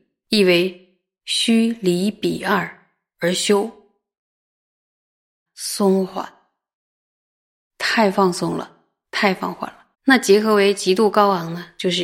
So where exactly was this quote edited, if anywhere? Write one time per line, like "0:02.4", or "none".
0:05.5
0:09.9